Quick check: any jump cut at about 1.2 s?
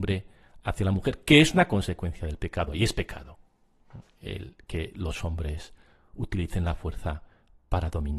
no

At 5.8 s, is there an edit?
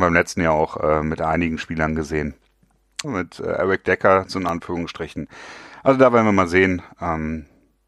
no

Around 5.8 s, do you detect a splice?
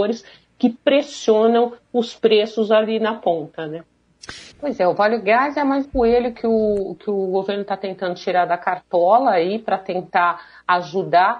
yes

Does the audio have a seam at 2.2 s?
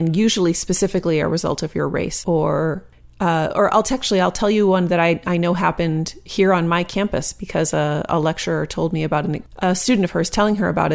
yes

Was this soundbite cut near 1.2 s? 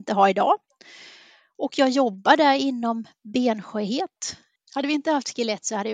no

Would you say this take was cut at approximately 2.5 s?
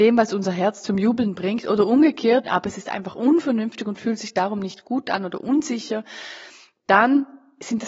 yes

